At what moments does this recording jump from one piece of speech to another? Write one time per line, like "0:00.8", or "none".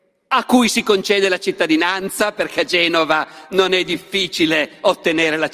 none